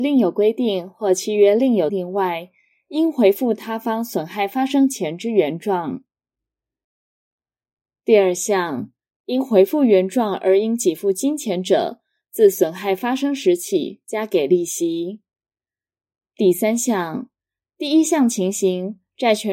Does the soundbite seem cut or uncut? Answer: cut